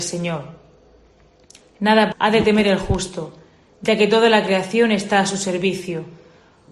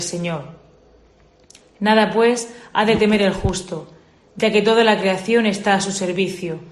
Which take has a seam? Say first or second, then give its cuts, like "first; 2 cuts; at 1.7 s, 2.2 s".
first; 1 cut; at 2.1 s